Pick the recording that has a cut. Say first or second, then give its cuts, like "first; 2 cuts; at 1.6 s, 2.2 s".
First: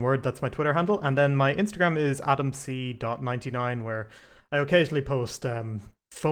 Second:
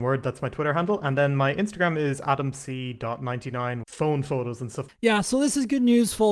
second; 2 cuts; at 3.8 s, 4.9 s